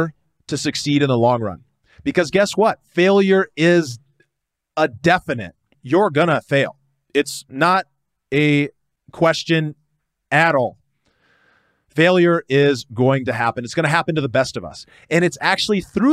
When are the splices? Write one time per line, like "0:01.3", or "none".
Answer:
0:05.7